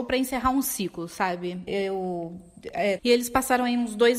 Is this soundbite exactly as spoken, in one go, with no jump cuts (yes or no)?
no